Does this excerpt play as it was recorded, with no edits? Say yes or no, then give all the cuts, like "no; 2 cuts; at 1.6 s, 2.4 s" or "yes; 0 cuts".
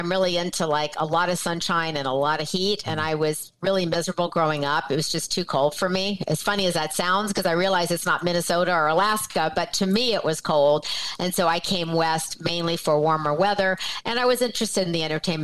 yes; 0 cuts